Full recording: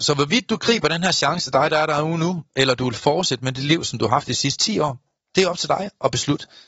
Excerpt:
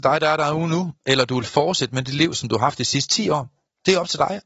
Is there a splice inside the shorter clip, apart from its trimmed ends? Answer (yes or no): no